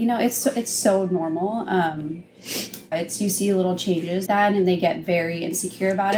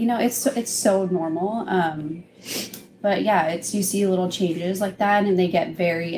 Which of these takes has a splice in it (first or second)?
first